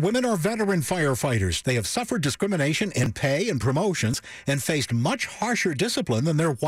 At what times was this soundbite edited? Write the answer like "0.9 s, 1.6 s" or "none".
1.6 s